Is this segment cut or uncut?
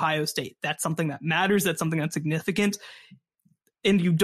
uncut